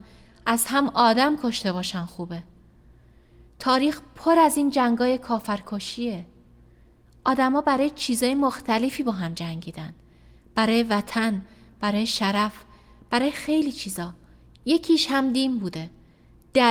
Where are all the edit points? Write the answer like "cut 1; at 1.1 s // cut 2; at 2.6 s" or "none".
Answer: none